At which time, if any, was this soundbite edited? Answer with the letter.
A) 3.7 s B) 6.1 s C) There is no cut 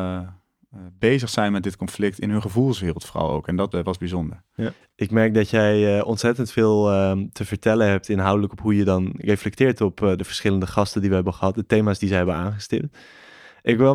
A